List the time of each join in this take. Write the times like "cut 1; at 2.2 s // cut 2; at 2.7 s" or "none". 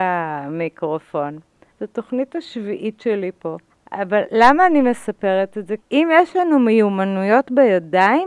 cut 1; at 1.7 s // cut 2; at 3.7 s // cut 3; at 5.8 s